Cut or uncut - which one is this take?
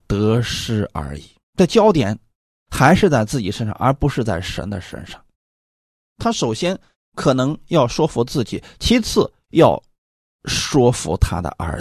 cut